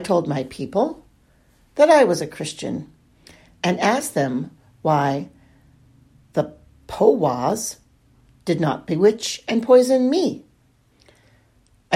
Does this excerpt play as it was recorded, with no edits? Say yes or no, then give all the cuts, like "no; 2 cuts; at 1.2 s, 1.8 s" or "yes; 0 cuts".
yes; 0 cuts